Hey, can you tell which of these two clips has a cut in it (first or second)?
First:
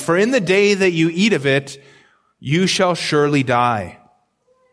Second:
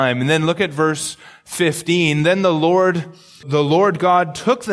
second